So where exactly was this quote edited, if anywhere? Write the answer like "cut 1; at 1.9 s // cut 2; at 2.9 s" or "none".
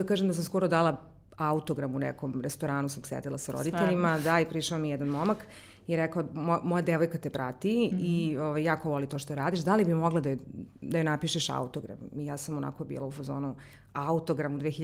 none